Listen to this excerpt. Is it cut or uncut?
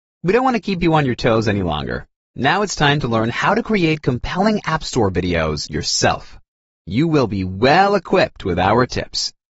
uncut